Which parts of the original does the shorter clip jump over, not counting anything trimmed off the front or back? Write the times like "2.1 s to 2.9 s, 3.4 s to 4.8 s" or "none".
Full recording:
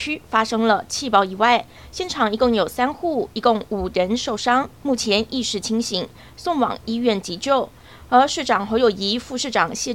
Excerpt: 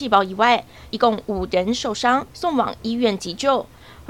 1.9 s to 3.3 s, 4.7 s to 6.3 s